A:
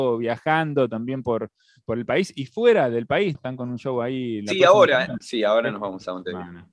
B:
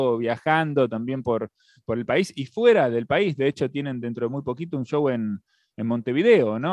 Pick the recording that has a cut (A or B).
A